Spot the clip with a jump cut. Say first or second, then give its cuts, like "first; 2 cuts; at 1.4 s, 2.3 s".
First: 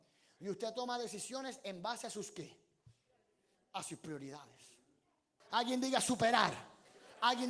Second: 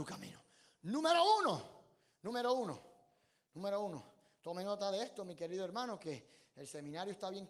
first; 1 cut; at 5.4 s